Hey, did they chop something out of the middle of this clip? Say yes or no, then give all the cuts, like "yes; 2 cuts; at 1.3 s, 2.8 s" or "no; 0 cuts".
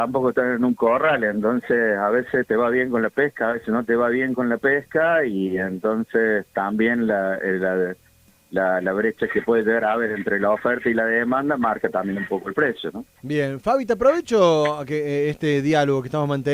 no; 0 cuts